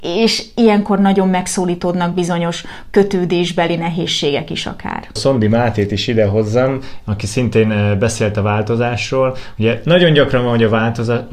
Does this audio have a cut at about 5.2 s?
yes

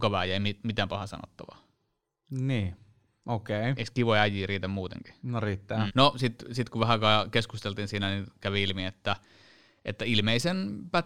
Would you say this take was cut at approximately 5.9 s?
yes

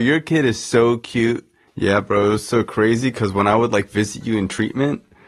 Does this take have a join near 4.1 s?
no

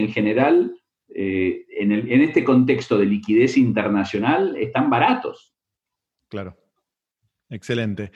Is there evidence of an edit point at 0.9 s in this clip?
no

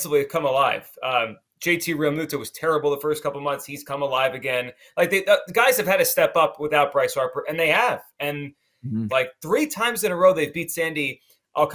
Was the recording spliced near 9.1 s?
yes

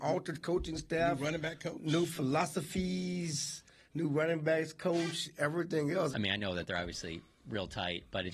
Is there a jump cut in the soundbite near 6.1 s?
yes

